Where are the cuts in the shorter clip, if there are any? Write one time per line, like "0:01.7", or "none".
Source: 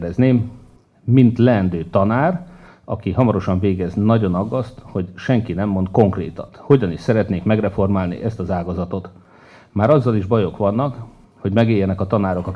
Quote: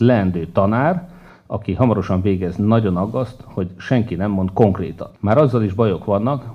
0:05.2